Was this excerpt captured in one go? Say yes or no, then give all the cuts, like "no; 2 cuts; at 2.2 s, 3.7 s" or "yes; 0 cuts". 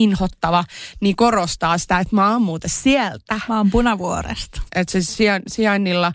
no; 1 cut; at 4.7 s